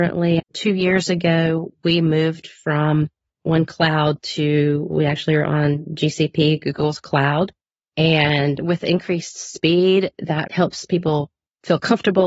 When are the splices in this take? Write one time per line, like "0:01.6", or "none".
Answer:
0:07.8
0:10.5